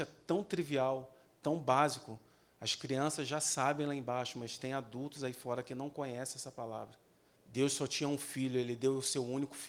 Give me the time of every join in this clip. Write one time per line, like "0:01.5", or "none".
0:07.4